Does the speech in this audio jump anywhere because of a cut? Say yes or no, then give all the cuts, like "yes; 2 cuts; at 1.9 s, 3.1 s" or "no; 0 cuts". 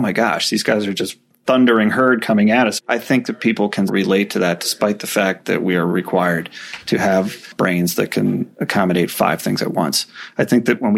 yes; 2 cuts; at 2.8 s, 3.9 s